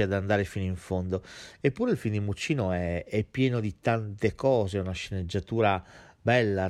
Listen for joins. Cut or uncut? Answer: uncut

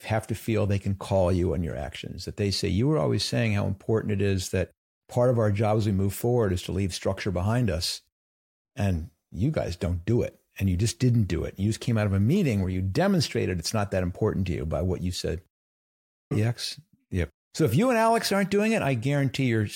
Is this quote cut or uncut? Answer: cut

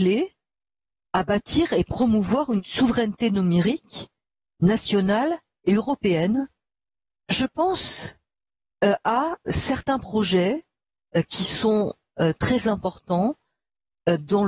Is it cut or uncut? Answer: cut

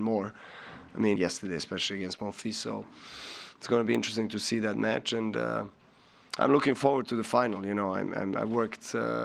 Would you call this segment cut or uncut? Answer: cut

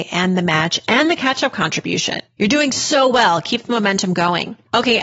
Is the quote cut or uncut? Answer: uncut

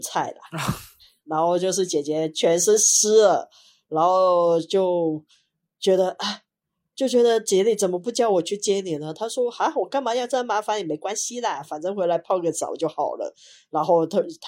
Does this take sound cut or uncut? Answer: uncut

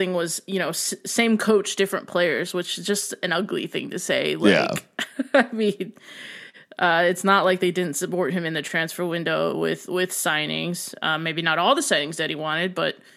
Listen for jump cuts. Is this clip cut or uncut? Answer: uncut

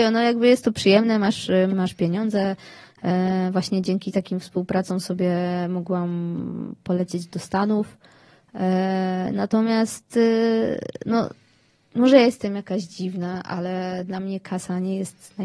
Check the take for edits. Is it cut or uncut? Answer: cut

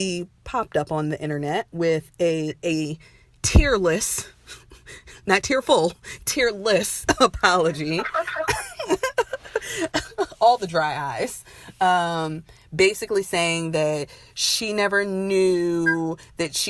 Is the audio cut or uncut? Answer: uncut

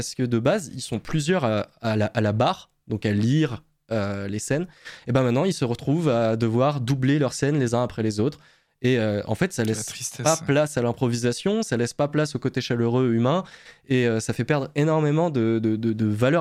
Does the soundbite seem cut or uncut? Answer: uncut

